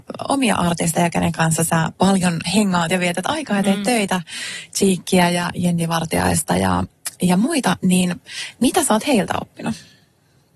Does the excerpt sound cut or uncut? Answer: cut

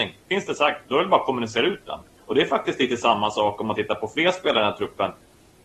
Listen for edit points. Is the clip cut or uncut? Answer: cut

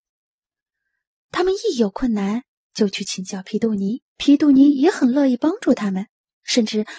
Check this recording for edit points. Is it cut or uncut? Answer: cut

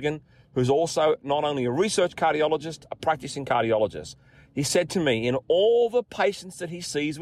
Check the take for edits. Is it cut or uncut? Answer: uncut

